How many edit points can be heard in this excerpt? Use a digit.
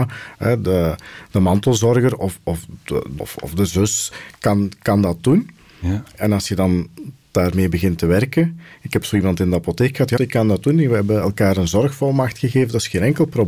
2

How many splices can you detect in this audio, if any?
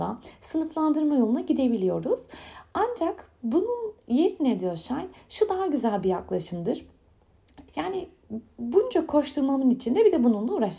1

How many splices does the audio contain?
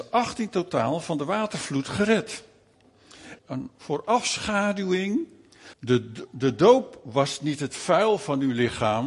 2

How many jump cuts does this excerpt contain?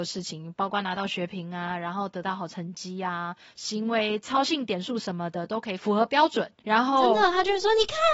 1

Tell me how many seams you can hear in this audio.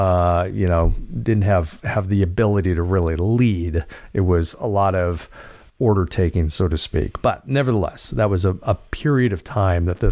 0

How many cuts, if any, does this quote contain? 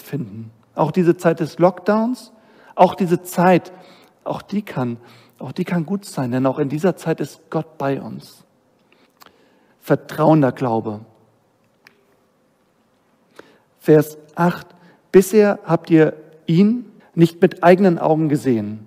2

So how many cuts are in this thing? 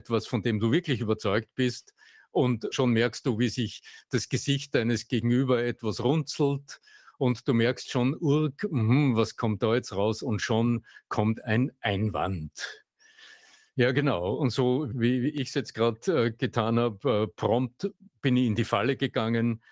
0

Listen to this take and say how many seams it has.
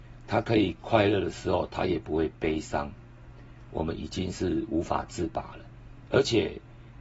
2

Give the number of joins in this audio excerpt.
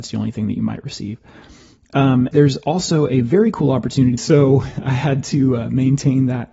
2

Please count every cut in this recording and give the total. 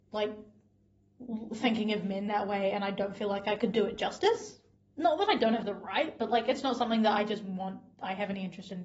2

